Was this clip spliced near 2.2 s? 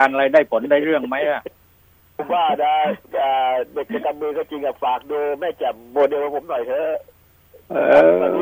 yes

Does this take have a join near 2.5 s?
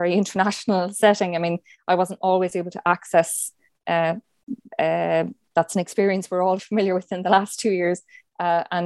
no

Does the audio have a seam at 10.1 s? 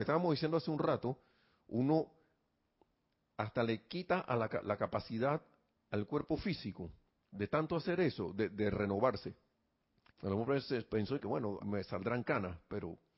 yes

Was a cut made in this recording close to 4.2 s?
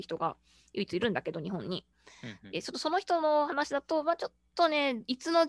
no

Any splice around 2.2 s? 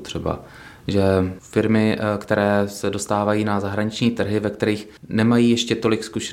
no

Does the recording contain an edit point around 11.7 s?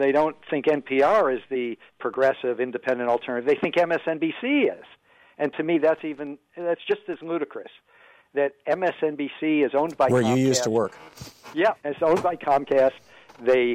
yes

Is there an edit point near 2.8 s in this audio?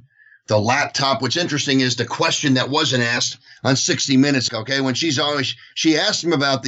no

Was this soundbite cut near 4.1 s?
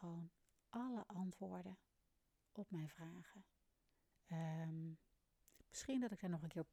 yes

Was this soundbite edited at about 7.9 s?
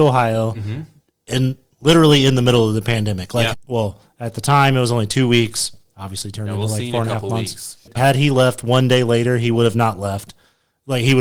yes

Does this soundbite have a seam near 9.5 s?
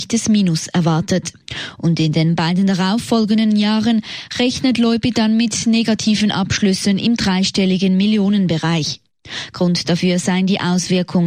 no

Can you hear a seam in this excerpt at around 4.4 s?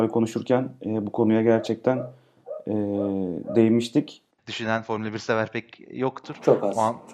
yes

